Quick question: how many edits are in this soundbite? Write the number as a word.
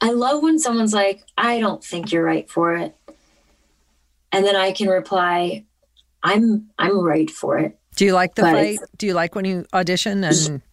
one